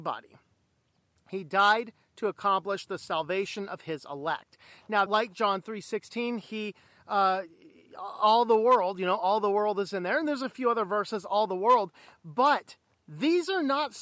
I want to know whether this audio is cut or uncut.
cut